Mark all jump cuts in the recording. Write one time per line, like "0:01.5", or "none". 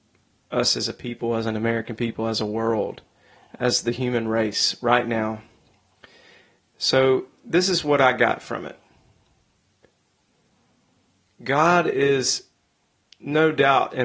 none